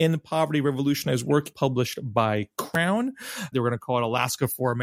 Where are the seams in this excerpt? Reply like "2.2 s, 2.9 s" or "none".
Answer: 1.5 s, 3.5 s